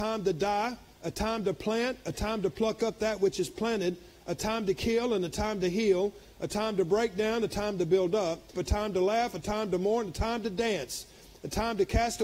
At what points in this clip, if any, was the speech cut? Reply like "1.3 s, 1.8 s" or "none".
8.5 s